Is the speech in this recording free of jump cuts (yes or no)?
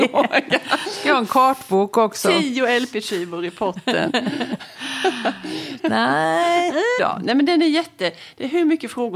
no